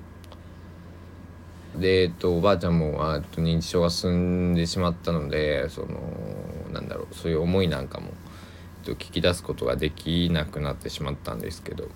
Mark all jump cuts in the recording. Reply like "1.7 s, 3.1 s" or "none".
1.7 s